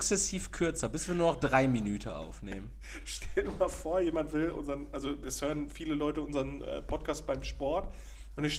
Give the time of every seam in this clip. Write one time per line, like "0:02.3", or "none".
none